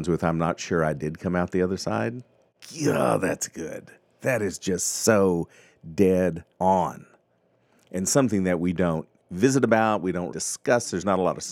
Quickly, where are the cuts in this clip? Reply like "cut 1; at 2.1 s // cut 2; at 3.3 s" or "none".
cut 1; at 6.5 s // cut 2; at 10.3 s